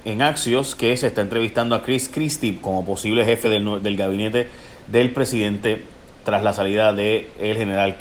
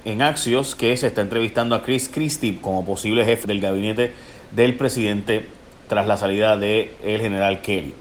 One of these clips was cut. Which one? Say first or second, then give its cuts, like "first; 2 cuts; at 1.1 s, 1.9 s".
second; 1 cut; at 3.4 s